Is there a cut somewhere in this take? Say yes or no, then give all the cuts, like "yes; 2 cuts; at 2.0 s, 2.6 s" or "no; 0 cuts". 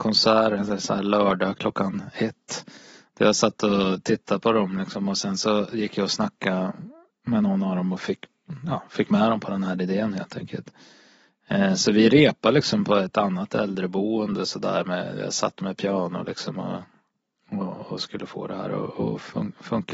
no; 0 cuts